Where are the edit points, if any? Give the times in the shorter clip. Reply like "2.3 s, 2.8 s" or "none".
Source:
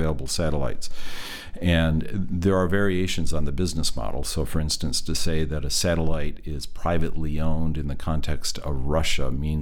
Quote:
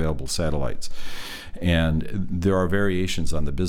none